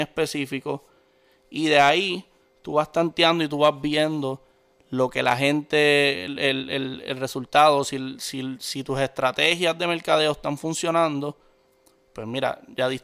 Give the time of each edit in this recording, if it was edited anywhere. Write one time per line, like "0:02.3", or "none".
none

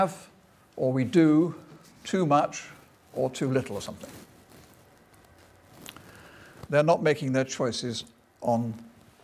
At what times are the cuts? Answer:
0:06.7

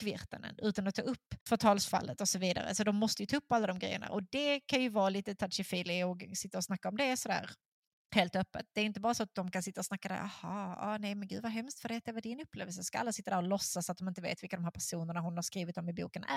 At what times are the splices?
none

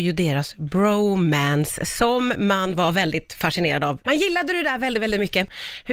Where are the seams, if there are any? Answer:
0:04.0

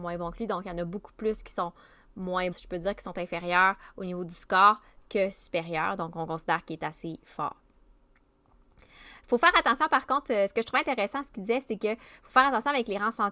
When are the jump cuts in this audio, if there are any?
0:02.5

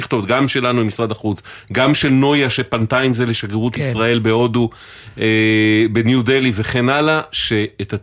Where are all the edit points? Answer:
none

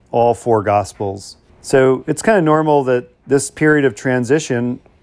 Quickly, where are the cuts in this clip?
0:01.5
0:03.2

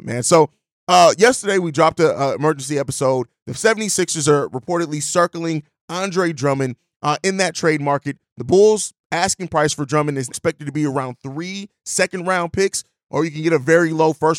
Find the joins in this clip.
0:10.3

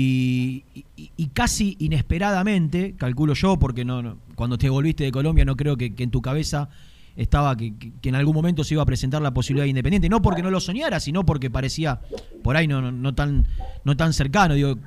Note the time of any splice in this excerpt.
none

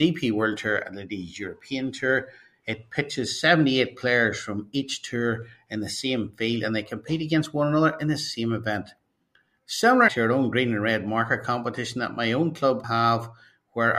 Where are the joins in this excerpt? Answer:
0:10.1
0:12.8

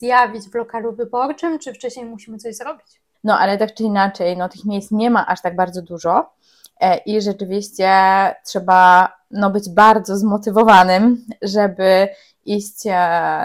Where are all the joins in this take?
0:03.1

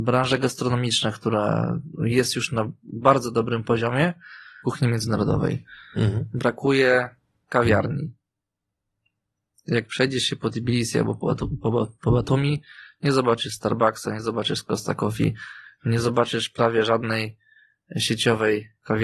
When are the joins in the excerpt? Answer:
0:04.6

